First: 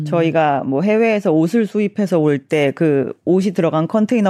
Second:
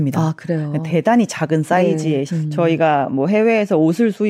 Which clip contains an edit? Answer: second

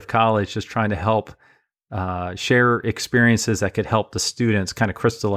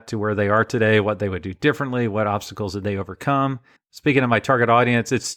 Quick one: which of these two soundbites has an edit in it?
second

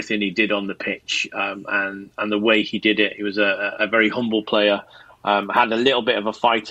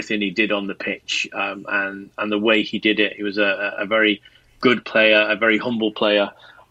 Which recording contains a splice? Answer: first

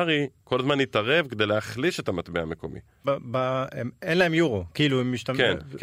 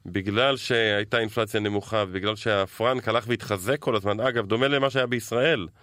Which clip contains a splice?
first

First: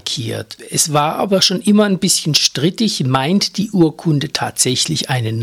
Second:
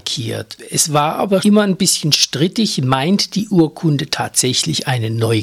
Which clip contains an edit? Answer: second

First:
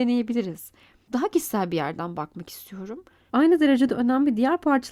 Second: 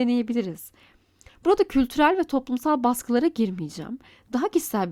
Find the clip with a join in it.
first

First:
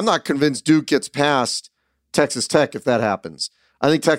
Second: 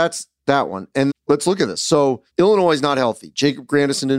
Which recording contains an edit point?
second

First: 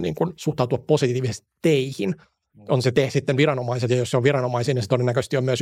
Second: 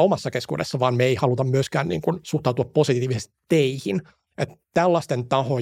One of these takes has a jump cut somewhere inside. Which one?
second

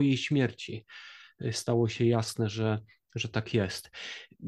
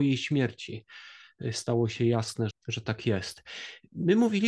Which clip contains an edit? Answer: second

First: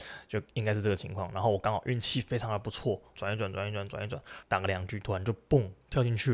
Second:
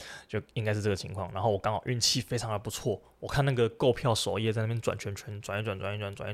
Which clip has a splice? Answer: first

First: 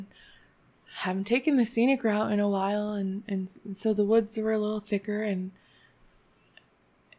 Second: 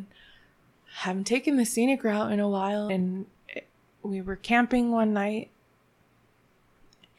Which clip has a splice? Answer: second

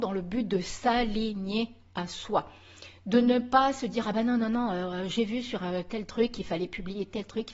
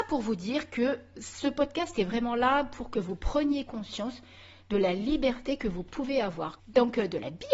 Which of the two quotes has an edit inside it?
second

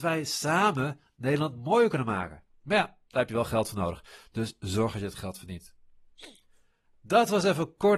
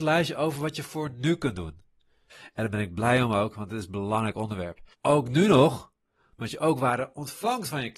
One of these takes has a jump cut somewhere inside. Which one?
second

